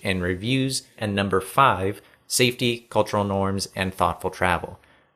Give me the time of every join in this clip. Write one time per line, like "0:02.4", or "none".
0:01.0